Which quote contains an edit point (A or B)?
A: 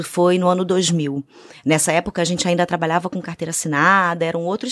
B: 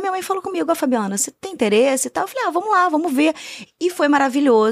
B